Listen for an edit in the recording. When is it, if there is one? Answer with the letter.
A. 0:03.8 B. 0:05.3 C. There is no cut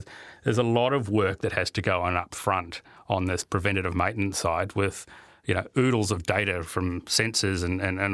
C